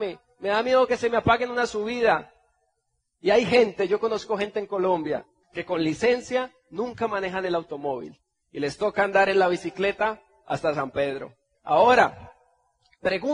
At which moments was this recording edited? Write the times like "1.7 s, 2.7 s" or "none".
5.4 s, 11.5 s